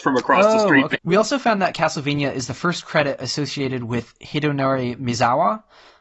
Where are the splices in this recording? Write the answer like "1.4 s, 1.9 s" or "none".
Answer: 0.9 s